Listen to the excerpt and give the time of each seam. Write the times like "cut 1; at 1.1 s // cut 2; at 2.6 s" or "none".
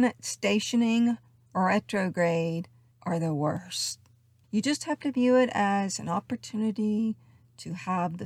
cut 1; at 4.4 s